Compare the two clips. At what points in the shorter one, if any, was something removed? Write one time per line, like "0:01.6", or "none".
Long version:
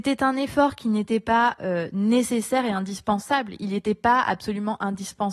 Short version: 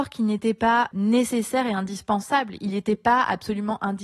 0:00.9